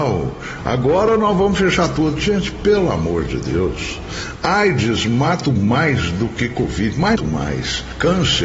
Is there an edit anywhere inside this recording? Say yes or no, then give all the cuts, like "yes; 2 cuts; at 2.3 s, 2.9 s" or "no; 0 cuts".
yes; 2 cuts; at 5.4 s, 7.2 s